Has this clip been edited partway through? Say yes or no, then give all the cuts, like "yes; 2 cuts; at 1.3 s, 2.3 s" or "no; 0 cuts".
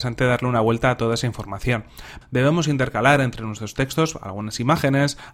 yes; 1 cut; at 2.2 s